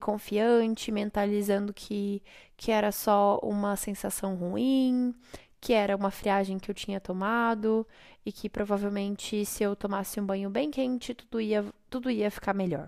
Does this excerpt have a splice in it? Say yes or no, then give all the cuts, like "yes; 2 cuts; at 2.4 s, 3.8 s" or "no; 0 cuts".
no; 0 cuts